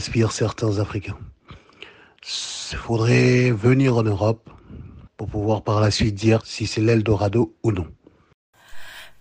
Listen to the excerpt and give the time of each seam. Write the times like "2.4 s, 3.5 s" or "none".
5.1 s, 6.4 s